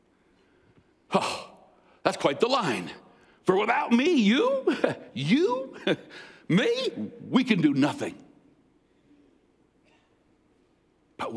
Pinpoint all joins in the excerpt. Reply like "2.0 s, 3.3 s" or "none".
none